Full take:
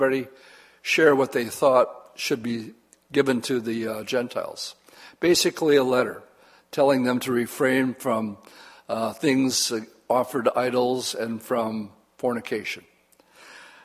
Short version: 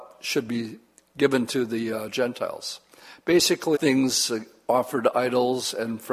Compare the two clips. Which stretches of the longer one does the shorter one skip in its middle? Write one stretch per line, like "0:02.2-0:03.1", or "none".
0:05.7-0:09.1